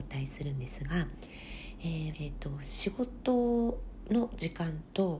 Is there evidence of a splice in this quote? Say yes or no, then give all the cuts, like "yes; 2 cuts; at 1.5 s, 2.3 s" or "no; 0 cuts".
yes; 1 cut; at 2.1 s